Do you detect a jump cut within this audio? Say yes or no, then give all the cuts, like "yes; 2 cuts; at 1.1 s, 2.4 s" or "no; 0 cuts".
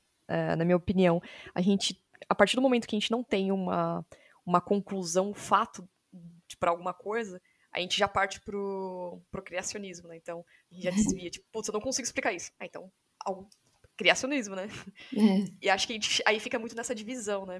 no; 0 cuts